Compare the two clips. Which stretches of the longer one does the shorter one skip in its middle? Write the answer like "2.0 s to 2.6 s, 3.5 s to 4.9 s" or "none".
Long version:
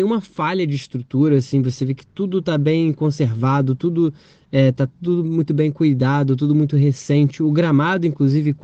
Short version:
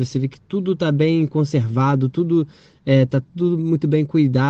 none

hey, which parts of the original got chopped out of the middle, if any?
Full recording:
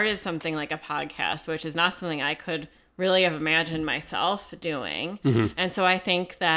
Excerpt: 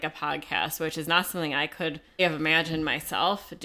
2.9 s to 3.2 s

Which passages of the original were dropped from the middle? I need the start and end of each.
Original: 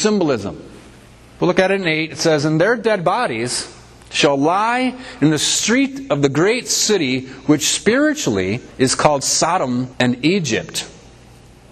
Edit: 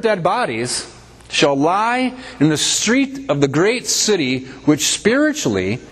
none

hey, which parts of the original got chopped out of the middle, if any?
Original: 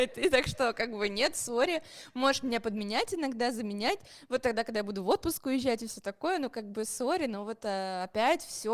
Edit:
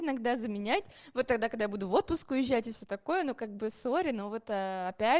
none

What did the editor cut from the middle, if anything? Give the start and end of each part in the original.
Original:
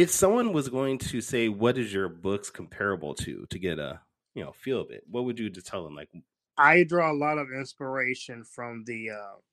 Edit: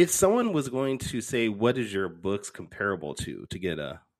none

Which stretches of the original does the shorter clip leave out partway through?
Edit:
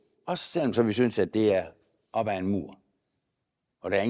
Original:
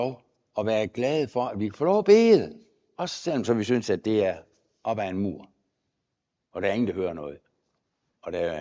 none

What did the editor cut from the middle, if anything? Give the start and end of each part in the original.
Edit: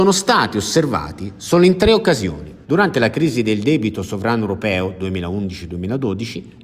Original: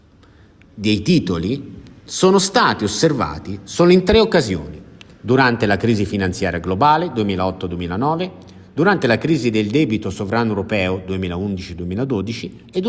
4.9 s to 8.7 s

